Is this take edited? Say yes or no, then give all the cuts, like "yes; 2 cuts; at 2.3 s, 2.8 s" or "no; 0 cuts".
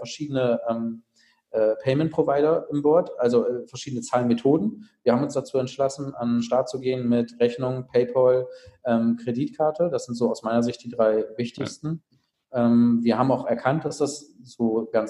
no; 0 cuts